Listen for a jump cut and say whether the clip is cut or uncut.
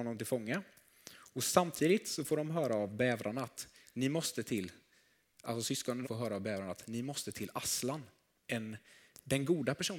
cut